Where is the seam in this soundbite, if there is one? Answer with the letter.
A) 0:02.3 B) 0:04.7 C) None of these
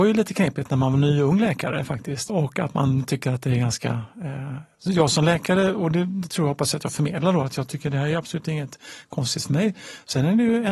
A